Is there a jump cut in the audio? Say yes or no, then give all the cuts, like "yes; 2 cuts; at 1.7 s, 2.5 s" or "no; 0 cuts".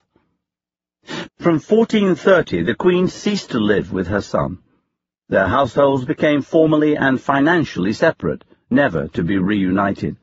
yes; 1 cut; at 1.3 s